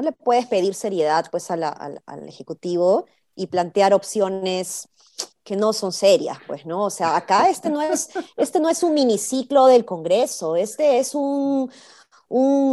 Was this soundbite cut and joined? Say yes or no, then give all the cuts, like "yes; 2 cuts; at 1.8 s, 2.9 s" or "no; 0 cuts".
no; 0 cuts